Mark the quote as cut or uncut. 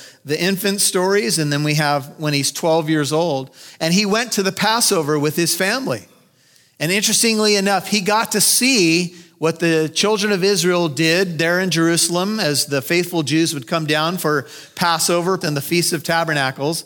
cut